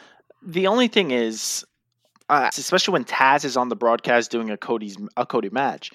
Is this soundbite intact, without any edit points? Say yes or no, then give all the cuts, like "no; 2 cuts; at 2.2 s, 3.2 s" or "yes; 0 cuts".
no; 1 cut; at 2.5 s